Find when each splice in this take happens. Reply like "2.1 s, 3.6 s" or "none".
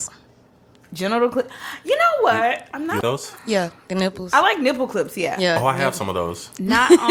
3.0 s

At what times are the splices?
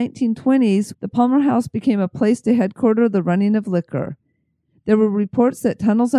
0.9 s

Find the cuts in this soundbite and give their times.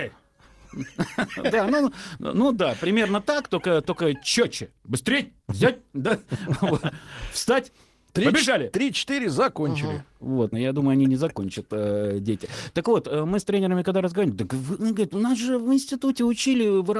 5.4 s, 10.5 s

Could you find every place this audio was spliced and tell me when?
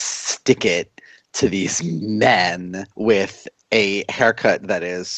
2.9 s

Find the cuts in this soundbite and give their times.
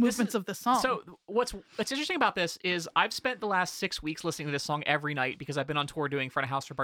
none

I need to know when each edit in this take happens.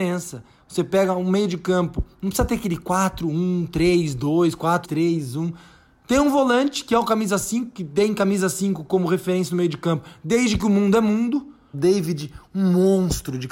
4.8 s, 11.7 s

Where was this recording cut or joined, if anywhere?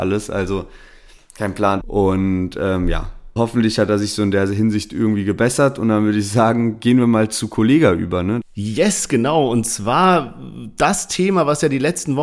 1.8 s, 3.4 s, 8.4 s

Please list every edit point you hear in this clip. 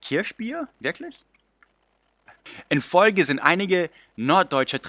2.3 s

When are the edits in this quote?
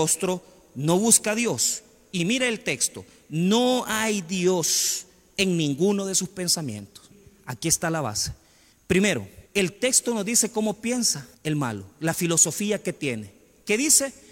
9.5 s, 11.3 s

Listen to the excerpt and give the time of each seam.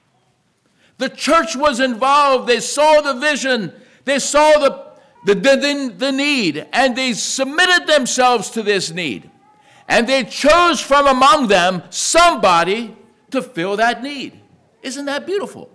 5.1 s

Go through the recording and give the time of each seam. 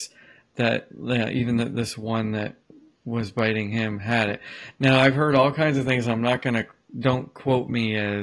none

